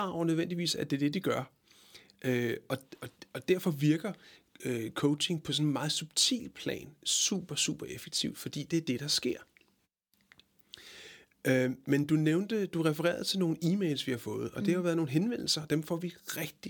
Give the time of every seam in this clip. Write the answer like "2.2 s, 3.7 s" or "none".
none